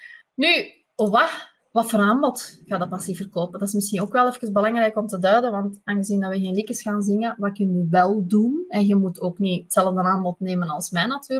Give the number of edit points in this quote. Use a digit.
0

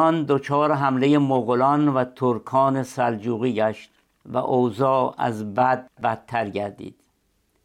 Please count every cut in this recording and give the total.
0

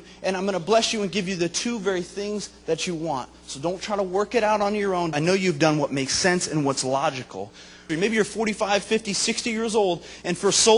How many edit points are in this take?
2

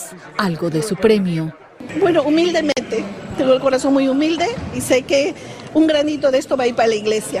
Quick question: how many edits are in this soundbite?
0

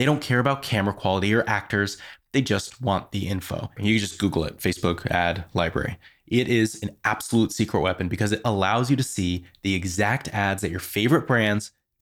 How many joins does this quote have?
1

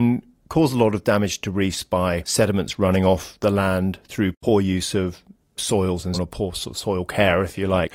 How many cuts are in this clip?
1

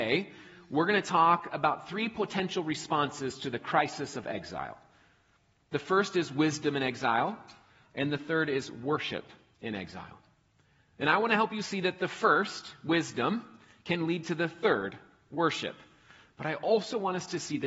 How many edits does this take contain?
1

